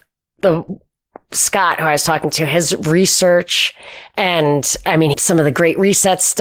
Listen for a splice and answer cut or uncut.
cut